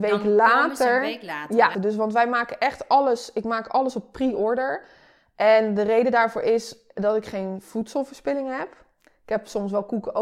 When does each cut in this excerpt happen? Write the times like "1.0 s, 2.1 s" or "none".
1.7 s